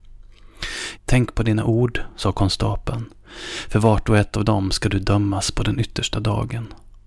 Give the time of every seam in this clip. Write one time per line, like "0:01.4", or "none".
0:01.0